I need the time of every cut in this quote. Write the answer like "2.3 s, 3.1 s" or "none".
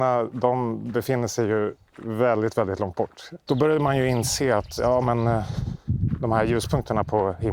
3.5 s